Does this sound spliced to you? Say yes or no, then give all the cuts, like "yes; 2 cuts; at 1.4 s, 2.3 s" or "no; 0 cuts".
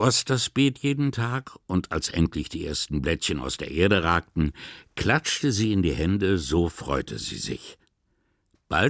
no; 0 cuts